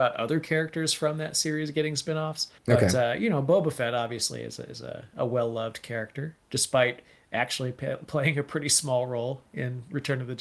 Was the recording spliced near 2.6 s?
yes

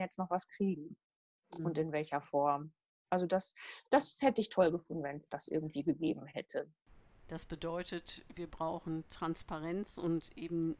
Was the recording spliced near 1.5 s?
no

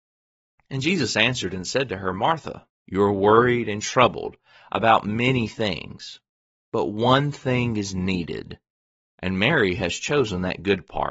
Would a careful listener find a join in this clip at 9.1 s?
no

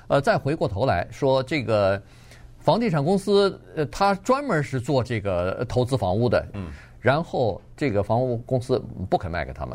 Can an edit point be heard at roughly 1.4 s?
no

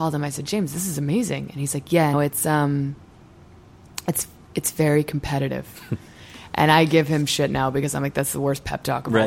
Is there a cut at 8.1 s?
no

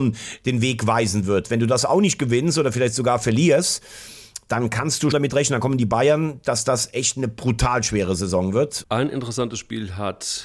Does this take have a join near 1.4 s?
no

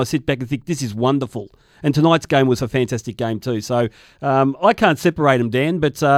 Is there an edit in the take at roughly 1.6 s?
no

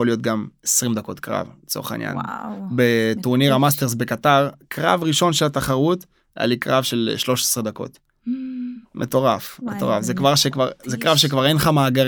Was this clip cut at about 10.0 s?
no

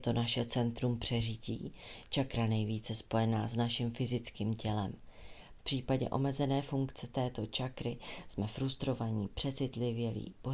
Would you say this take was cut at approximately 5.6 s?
yes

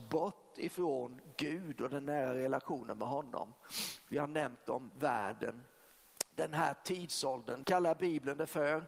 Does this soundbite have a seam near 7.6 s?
yes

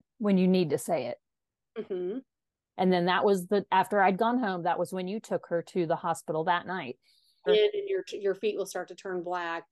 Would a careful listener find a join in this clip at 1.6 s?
yes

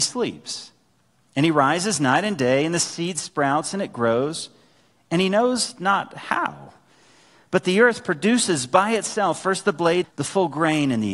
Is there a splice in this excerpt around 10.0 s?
yes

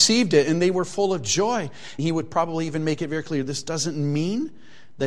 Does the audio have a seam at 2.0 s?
yes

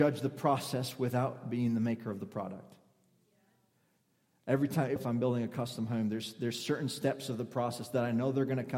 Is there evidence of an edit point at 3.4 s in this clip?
no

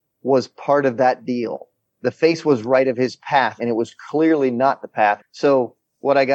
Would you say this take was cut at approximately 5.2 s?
yes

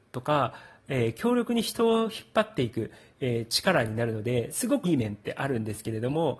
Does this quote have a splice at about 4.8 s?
yes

